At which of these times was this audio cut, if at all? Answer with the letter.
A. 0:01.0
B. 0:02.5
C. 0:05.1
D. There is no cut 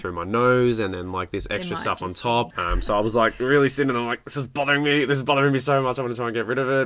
B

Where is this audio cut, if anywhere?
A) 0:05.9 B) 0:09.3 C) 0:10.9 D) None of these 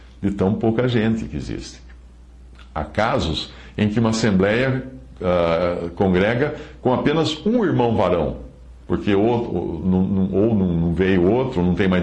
D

